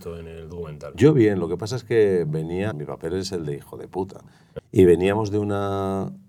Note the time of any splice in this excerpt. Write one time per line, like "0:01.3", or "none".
0:02.7
0:04.6

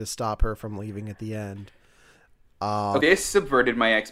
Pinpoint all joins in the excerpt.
0:03.0

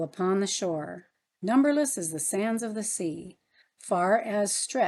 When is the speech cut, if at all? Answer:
0:03.6

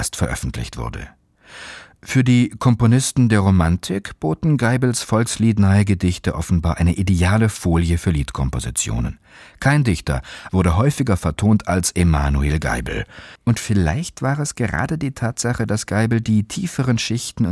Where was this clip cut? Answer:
0:10.5
0:13.4

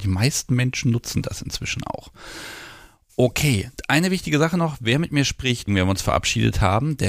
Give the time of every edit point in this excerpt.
0:05.7

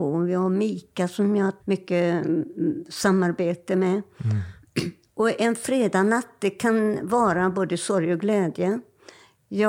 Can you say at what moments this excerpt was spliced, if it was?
0:01.6

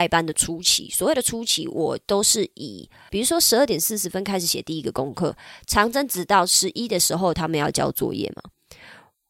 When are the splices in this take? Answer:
0:03.1

